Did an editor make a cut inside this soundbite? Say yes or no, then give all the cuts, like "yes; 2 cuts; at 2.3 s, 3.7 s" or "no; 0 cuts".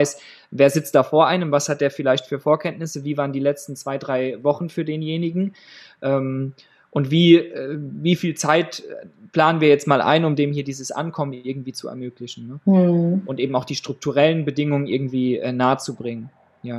no; 0 cuts